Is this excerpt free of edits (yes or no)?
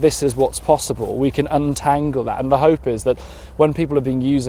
yes